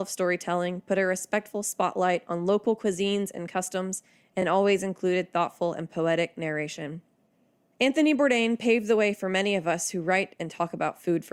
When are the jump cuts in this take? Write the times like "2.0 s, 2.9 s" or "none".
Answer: none